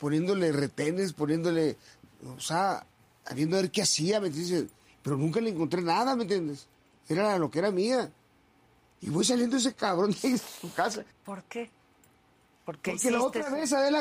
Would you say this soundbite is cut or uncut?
cut